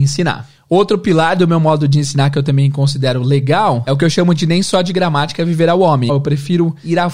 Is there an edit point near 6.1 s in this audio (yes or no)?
yes